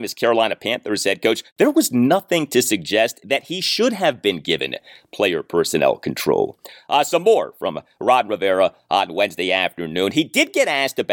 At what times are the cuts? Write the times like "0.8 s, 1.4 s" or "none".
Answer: none